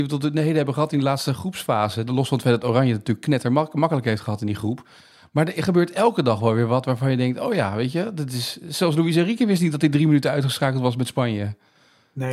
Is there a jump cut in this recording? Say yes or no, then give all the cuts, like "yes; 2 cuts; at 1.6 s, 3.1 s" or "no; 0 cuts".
yes; 1 cut; at 2.1 s